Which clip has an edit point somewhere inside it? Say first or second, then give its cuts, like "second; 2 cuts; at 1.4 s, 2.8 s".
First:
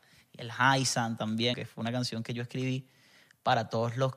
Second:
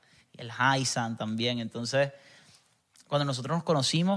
first; 1 cut; at 1.5 s